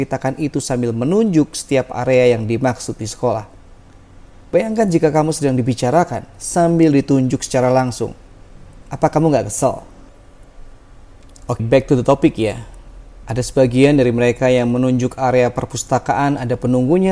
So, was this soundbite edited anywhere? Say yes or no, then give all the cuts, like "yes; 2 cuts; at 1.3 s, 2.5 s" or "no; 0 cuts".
yes; 2 cuts; at 11.6 s, 13.2 s